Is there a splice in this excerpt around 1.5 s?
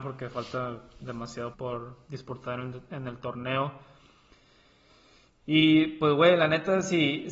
yes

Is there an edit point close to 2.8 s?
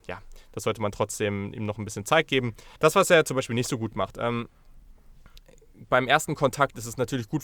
yes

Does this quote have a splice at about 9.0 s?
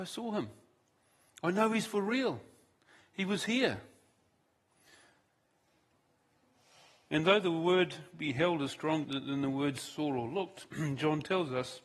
yes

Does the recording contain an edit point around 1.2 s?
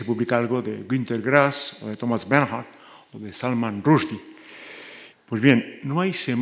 no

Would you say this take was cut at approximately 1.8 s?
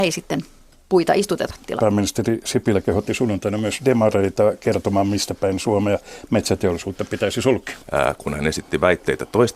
yes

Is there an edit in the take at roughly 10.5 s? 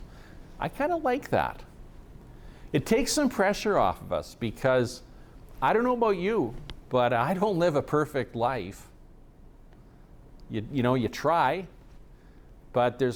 no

